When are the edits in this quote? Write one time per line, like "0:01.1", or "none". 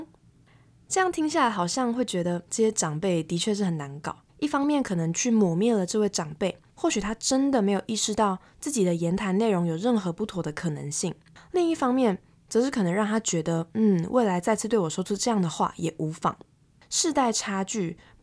0:02.5
0:04.3